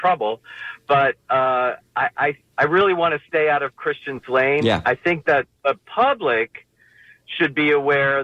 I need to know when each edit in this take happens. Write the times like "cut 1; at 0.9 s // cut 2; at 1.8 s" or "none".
cut 1; at 2.5 s